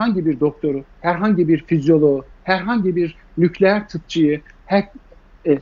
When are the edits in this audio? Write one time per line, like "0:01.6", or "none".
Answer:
0:02.3